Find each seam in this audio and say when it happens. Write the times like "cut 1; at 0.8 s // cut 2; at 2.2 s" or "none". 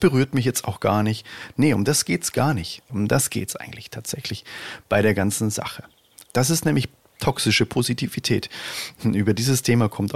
cut 1; at 2.9 s // cut 2; at 6.3 s